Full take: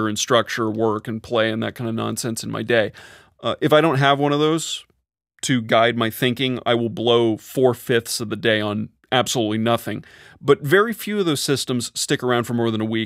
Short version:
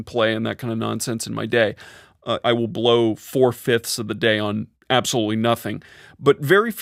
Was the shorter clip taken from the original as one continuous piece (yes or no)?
no